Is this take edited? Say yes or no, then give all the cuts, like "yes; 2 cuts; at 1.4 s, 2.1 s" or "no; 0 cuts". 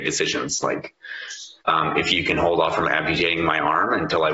yes; 1 cut; at 1.6 s